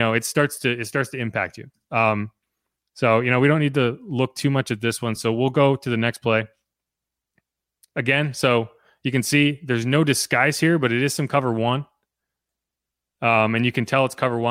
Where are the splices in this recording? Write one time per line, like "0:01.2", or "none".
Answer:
none